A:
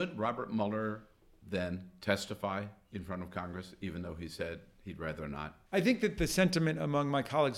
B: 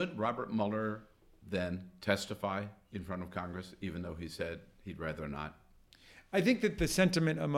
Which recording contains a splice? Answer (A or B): A